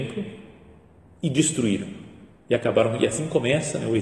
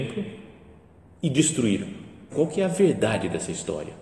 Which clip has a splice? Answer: second; 1 cut; at 2.3 s

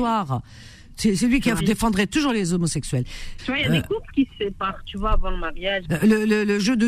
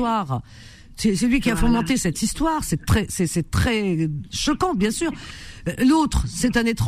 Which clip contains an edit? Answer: first; 3 cuts; at 1.6 s, 3.4 s, 5.8 s

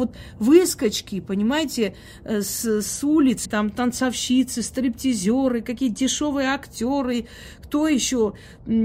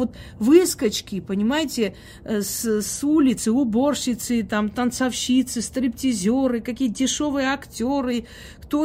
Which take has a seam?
first; 1 cut; at 3.4 s

